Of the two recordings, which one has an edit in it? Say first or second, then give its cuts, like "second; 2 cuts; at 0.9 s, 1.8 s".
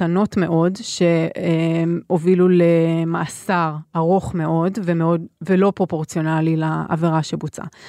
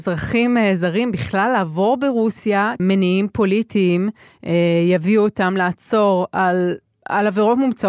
second; 1 cut; at 2.8 s